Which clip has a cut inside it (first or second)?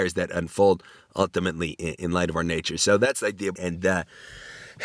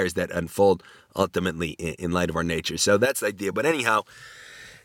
first